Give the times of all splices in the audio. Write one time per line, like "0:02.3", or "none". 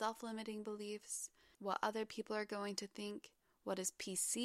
none